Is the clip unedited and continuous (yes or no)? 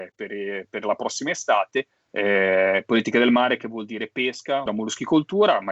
no